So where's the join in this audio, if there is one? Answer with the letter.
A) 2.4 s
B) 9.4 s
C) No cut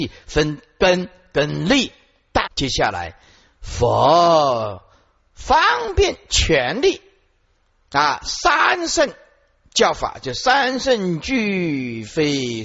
A